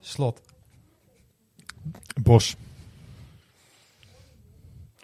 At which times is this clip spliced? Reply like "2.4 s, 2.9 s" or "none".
none